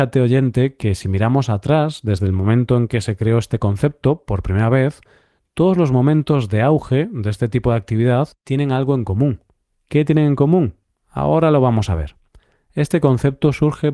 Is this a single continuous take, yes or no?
yes